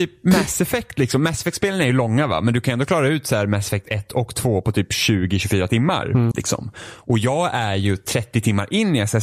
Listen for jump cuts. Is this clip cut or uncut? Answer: cut